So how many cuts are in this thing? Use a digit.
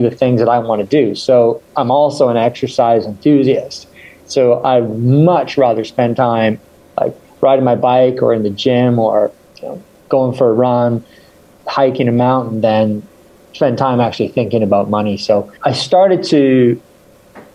1